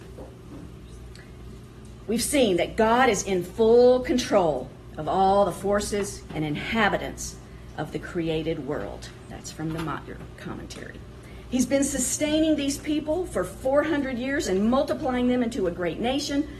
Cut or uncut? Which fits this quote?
cut